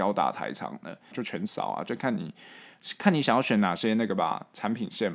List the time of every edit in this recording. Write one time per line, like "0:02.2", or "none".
0:01.1